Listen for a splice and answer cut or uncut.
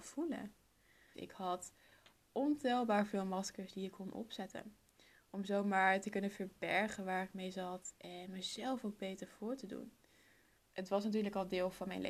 cut